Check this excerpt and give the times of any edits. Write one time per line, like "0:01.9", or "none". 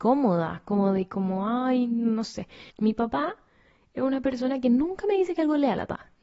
0:02.7